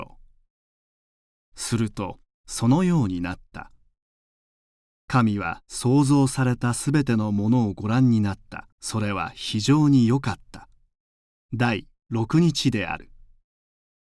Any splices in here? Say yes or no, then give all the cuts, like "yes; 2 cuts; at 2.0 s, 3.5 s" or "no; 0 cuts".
yes; 2 cuts; at 8.7 s, 11.4 s